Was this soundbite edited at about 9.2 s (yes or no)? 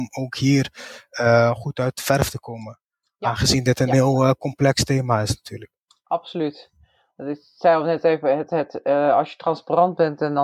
no